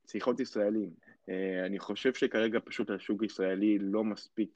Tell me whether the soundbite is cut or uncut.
cut